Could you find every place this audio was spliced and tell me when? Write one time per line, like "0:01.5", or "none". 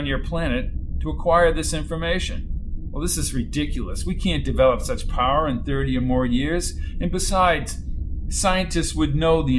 none